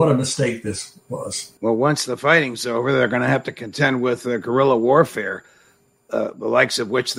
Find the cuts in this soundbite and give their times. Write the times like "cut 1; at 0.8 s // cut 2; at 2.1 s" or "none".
cut 1; at 1.6 s

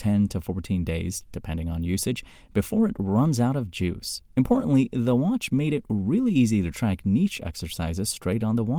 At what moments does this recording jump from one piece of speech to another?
none

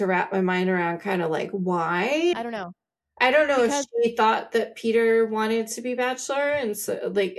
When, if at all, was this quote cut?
cut 1; at 2.3 s

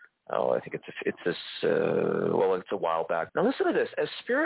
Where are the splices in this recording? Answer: cut 1; at 3.3 s

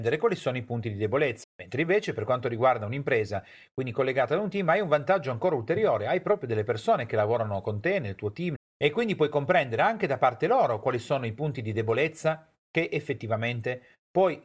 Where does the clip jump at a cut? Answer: cut 1; at 1.4 s // cut 2; at 8.6 s

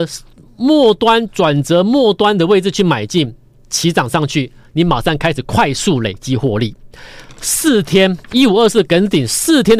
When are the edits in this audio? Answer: none

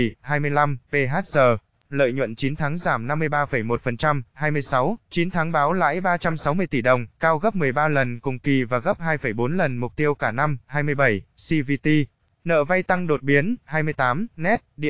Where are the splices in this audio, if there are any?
cut 1; at 1.9 s // cut 2; at 5.0 s // cut 3; at 13.6 s

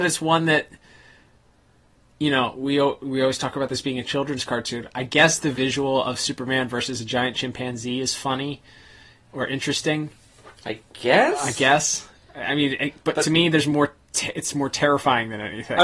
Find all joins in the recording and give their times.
none

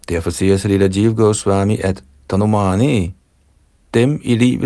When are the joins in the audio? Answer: none

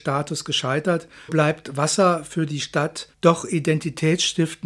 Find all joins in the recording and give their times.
cut 1; at 1.3 s // cut 2; at 3.1 s

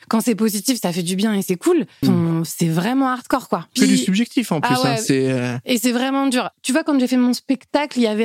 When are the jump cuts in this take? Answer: cut 1; at 2.0 s // cut 2; at 3.8 s

